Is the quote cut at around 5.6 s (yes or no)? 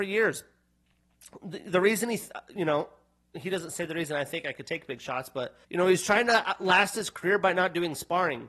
yes